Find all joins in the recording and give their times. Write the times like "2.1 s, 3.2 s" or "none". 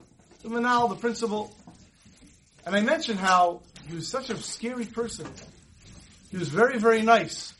none